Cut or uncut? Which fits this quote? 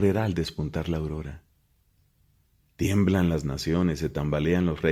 uncut